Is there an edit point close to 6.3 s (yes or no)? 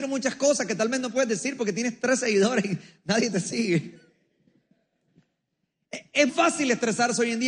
yes